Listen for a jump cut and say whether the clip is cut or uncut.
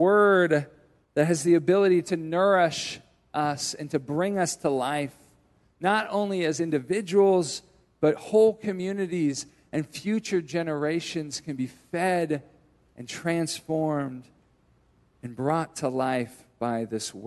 uncut